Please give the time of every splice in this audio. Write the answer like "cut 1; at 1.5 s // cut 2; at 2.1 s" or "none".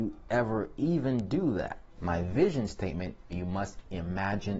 cut 1; at 2.0 s // cut 2; at 3.3 s